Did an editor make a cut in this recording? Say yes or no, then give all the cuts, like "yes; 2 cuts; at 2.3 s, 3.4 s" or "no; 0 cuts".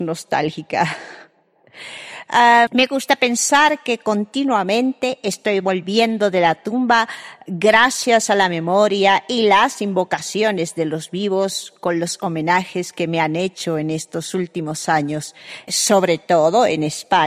yes; 2 cuts; at 2.7 s, 15.7 s